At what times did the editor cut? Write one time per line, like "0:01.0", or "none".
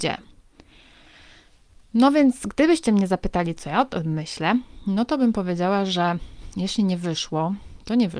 none